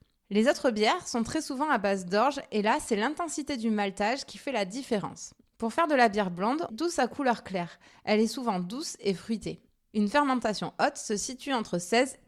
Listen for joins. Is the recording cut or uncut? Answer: cut